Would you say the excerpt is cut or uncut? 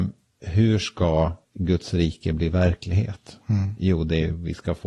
cut